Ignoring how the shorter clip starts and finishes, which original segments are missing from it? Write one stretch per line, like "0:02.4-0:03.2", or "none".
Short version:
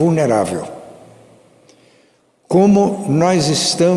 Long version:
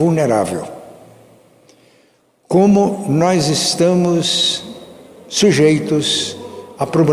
none